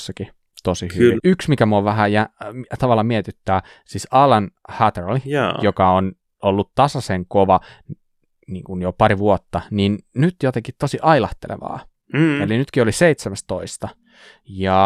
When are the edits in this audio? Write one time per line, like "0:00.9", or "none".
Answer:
0:01.2